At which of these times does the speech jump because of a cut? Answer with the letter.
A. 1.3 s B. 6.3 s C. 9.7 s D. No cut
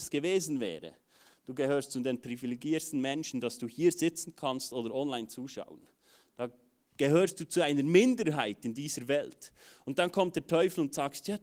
D